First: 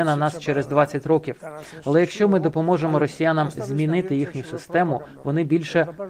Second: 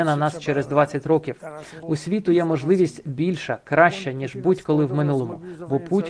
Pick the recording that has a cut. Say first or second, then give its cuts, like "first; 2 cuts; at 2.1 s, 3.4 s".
second; 1 cut; at 1.8 s